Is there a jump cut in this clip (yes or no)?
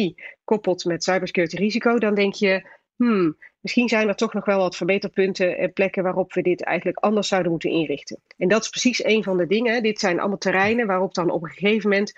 no